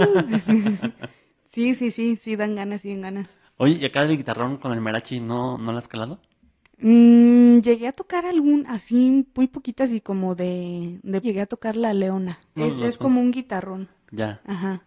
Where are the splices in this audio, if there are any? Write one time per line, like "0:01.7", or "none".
0:11.2
0:12.6